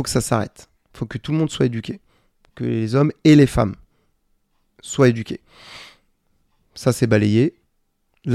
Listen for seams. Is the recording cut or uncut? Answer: uncut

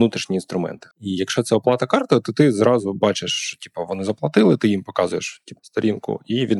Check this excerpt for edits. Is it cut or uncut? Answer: cut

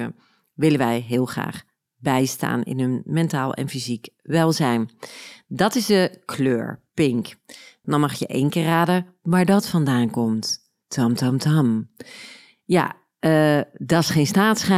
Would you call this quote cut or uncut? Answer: cut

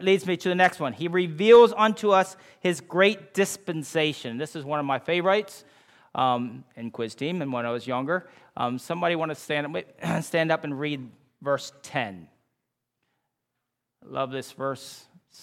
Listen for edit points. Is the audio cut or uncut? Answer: uncut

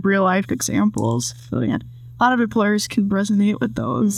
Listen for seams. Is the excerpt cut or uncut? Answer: uncut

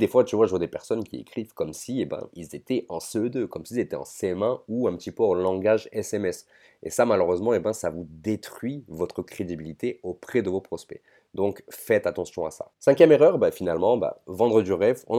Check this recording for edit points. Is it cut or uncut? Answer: uncut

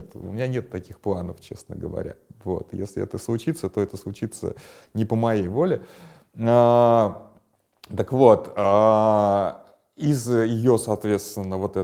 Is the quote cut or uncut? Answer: uncut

